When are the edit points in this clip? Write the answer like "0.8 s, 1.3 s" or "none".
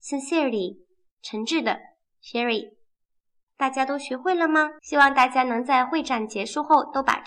3.5 s, 4.8 s